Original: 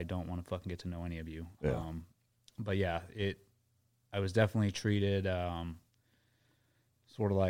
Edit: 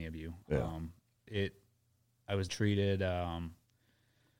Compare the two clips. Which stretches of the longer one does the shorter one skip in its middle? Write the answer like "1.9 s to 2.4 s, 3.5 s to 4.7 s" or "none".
2.4 s to 3.1 s, 4.3 s to 4.7 s